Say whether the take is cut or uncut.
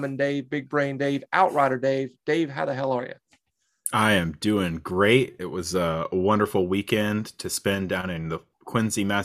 uncut